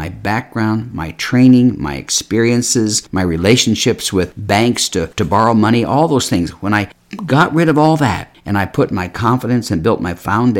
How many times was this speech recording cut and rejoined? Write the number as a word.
zero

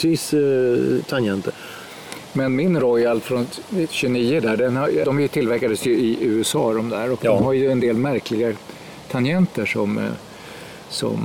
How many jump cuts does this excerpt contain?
one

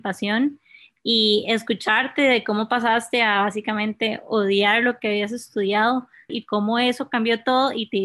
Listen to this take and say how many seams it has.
one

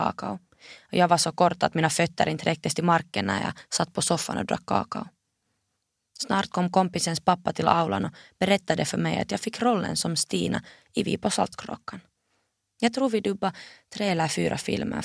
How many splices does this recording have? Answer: zero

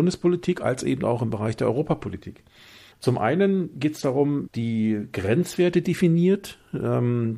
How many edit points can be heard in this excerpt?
two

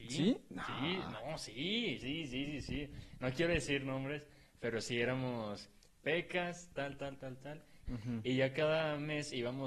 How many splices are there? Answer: three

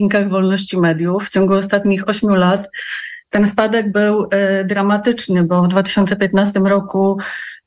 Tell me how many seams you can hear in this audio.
zero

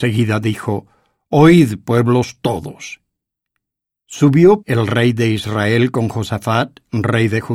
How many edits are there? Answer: one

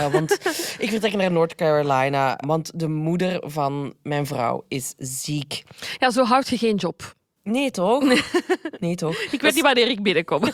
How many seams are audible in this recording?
one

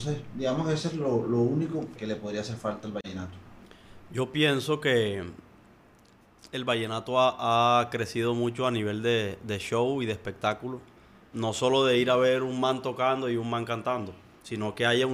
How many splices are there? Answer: two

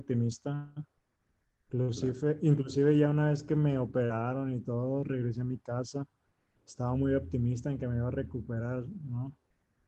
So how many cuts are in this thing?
zero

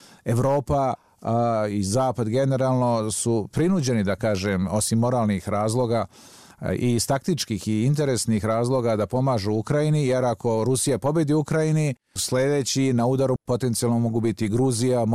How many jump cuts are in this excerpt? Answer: zero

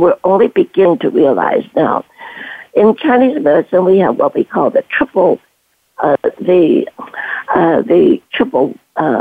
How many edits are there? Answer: one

